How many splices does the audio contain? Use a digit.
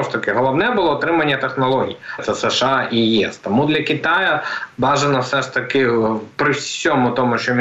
1